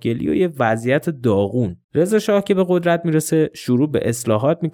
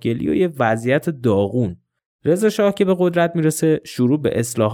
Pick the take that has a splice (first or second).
first